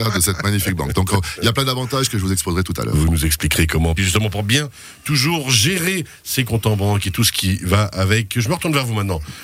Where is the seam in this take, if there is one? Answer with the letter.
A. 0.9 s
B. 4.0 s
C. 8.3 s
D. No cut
B